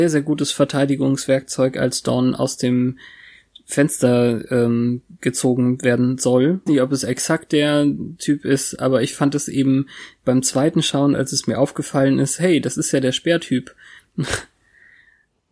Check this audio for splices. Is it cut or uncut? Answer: cut